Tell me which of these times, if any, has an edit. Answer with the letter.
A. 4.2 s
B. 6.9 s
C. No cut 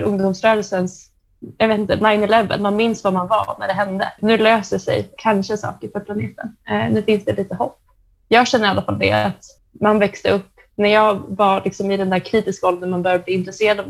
A